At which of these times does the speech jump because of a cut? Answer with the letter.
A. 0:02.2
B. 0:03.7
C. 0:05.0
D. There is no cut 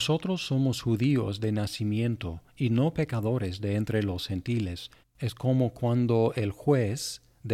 C